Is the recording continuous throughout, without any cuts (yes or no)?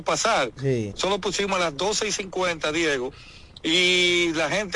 no